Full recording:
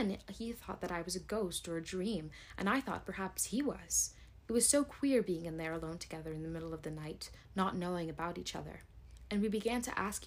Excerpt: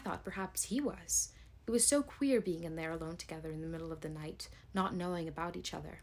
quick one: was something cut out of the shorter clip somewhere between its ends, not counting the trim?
no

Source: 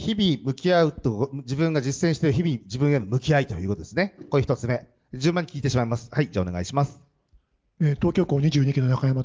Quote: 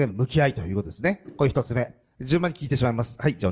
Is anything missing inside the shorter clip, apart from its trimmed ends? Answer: no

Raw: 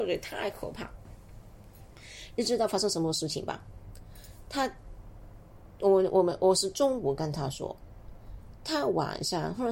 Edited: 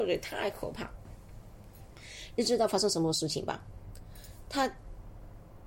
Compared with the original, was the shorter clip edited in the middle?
no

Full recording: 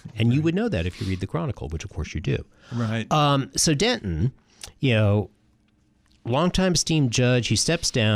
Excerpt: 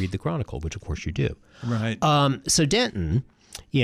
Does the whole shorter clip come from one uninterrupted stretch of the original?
yes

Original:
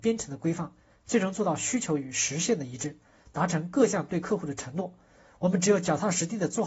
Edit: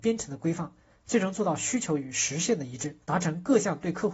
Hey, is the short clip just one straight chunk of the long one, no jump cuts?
no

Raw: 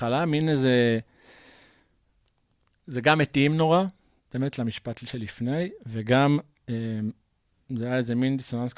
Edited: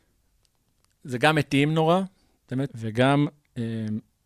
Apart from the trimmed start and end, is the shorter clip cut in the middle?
yes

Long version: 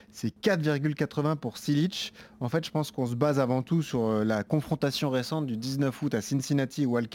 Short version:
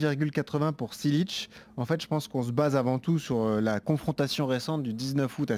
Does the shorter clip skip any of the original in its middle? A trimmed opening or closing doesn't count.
no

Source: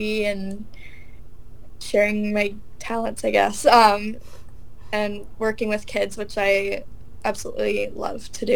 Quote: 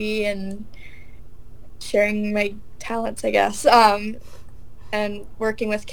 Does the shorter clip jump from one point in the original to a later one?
no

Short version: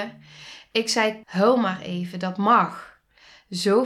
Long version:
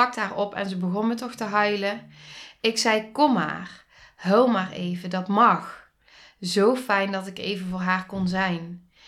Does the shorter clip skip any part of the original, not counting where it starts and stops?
yes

